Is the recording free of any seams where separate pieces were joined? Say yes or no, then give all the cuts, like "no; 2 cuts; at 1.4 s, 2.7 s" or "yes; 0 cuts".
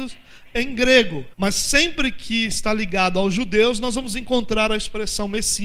no; 1 cut; at 1.3 s